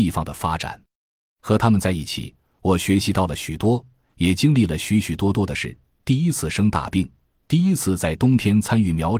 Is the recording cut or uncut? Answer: uncut